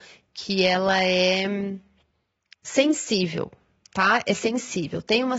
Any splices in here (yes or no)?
no